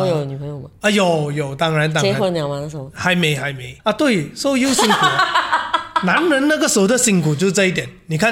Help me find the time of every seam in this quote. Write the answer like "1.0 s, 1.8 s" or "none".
3.8 s